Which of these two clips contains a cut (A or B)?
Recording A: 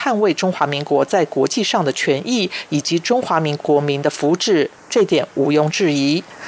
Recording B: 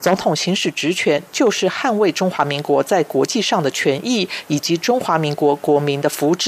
A